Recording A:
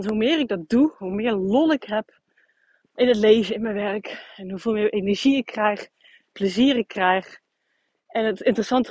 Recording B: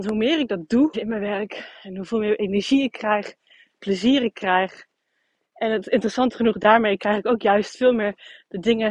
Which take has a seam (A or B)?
B